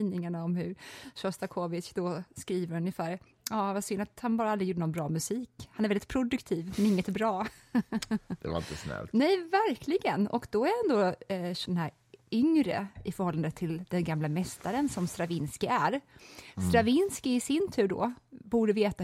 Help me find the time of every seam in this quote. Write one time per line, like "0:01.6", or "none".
0:11.7